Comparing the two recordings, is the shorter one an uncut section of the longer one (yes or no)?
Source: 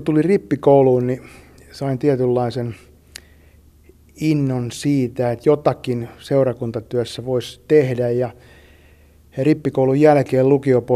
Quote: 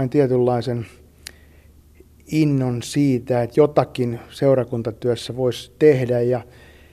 yes